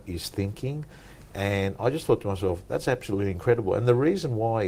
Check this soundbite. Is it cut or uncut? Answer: uncut